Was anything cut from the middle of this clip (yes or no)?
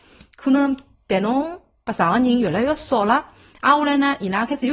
no